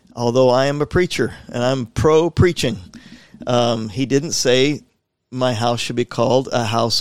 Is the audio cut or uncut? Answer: uncut